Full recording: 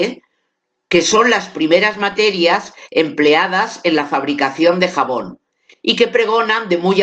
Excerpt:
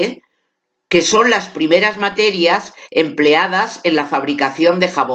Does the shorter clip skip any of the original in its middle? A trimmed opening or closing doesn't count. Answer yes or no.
no